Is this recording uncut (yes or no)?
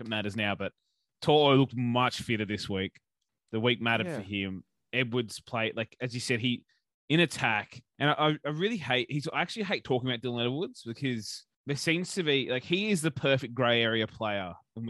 no